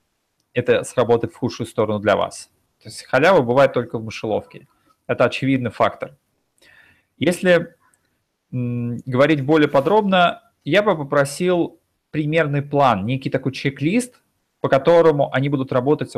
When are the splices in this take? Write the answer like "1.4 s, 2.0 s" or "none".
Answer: none